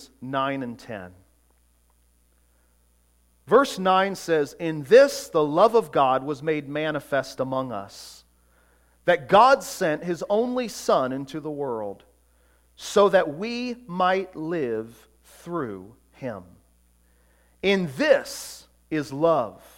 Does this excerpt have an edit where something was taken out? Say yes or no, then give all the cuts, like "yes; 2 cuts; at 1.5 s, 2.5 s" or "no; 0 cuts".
no; 0 cuts